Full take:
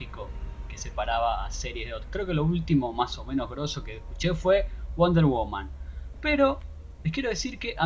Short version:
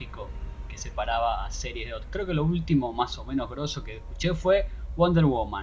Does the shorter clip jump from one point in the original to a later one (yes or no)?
no